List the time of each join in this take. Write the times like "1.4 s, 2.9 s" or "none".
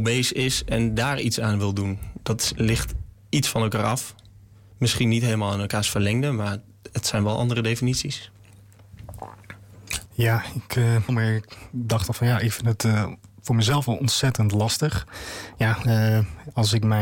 10.1 s, 11.1 s

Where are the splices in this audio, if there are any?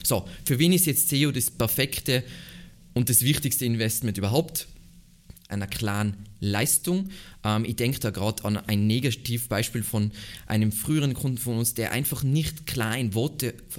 5.5 s

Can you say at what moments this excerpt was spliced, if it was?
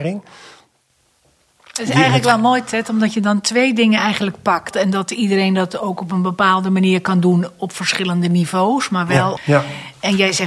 4.7 s, 9.4 s

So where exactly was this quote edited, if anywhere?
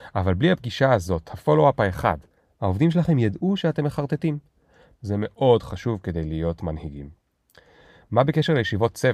5.0 s

